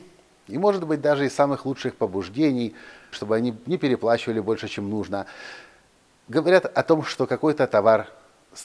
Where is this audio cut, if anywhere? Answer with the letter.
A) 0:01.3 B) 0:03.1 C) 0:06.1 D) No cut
B